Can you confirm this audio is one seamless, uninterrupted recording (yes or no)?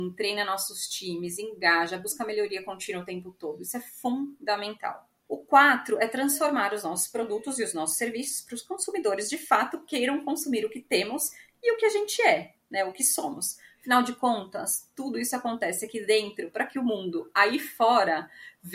yes